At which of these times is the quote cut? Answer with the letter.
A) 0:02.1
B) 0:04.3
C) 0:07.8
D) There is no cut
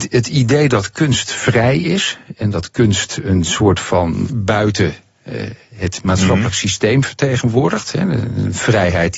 B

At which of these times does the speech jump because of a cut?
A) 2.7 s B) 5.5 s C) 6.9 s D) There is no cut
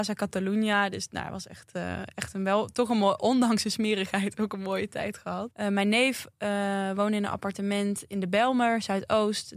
B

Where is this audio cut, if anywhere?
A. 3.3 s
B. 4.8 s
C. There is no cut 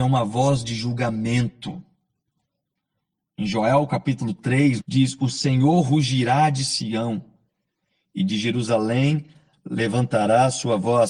B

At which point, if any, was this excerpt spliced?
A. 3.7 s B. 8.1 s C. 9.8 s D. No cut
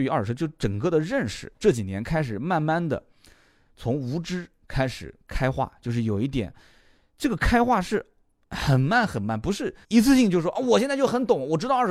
C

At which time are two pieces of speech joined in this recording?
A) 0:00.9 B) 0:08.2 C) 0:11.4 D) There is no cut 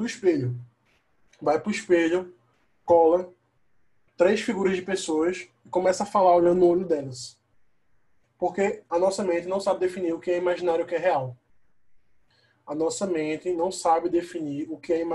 B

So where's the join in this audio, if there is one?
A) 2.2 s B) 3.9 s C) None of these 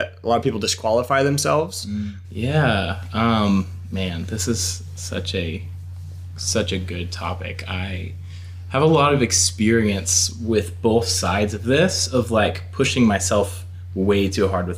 A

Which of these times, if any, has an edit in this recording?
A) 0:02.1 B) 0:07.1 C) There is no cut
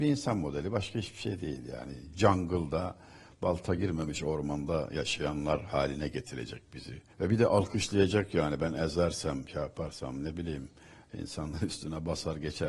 B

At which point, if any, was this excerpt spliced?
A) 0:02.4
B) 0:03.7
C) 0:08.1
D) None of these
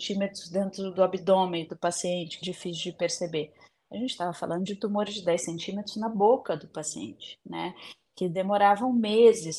A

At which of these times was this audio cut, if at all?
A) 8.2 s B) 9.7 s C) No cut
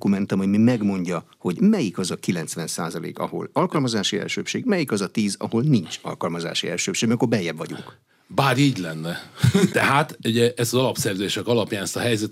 B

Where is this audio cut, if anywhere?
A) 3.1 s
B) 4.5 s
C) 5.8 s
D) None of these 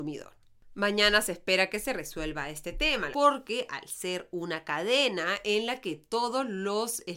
A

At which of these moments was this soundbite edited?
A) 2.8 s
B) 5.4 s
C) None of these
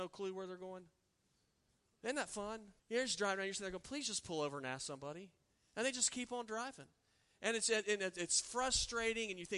A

